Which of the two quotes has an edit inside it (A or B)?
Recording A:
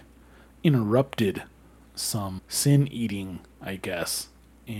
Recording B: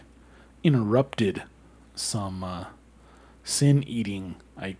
A